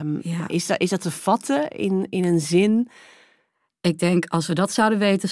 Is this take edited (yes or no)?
no